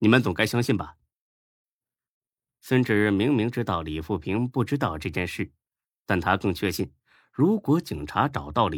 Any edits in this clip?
no; 0 cuts

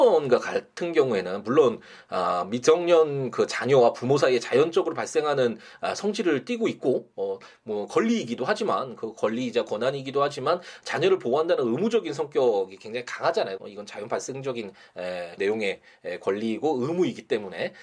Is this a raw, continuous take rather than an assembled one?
no; 2 cuts; at 13.6 s, 15.4 s

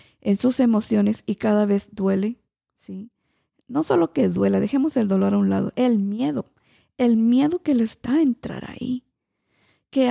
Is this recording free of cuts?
yes; 0 cuts

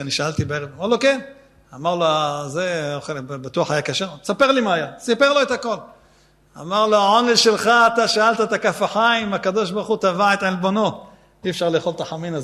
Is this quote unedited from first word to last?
no; 1 cut; at 11.4 s

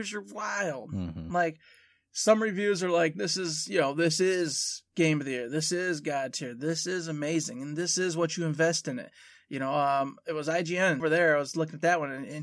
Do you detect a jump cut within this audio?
no; 0 cuts

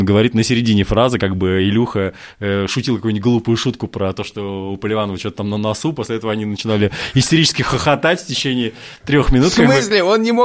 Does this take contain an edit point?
no; 0 cuts

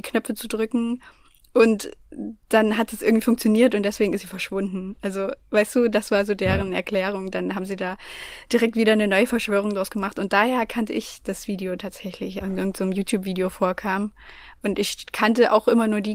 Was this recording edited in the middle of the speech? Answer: yes; 1 cut; at 12.4 s

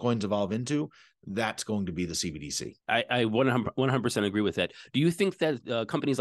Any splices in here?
yes; 1 cut; at 2.8 s

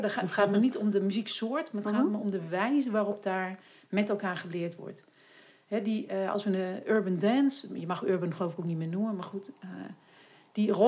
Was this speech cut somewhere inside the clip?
no; 0 cuts

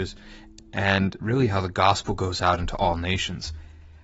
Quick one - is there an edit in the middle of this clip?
no; 0 cuts

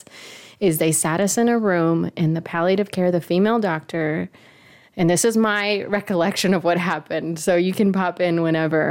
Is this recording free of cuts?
yes; 0 cuts

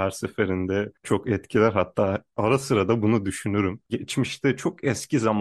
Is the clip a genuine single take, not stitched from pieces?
no; 1 cut; at 3.8 s

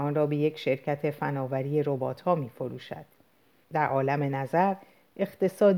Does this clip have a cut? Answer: yes; 1 cut; at 3.6 s

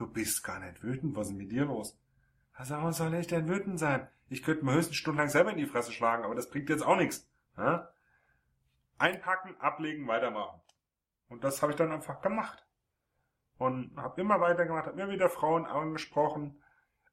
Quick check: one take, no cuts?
yes; 0 cuts

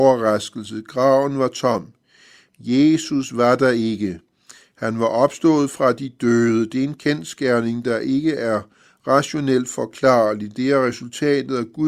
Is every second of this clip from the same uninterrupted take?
yes; 0 cuts

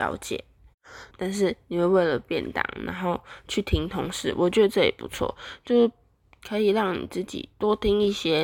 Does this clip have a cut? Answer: yes; 1 cut; at 1.1 s

